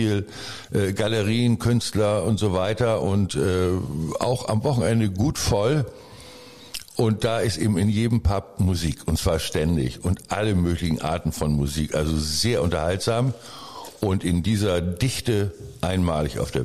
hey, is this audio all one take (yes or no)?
yes